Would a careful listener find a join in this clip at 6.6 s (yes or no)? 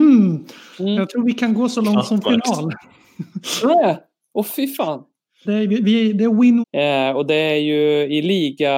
yes